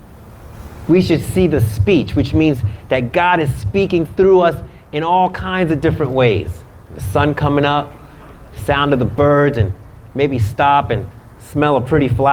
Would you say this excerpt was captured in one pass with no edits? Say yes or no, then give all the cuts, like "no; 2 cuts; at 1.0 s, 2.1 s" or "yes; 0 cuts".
no; 1 cut; at 6.8 s